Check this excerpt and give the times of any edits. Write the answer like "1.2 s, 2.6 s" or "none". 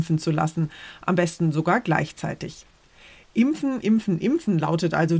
none